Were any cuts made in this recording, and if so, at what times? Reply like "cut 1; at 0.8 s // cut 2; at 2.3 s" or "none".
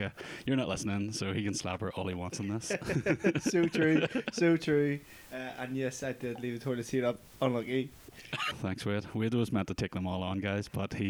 cut 1; at 8.5 s